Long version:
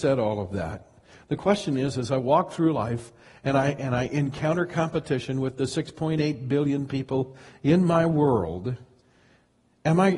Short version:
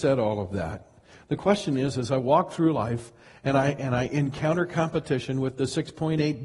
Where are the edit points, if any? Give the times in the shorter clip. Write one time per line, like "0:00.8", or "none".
none